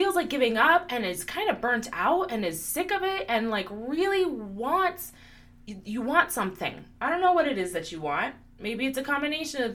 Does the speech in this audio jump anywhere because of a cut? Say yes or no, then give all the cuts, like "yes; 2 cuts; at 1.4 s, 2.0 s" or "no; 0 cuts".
no; 0 cuts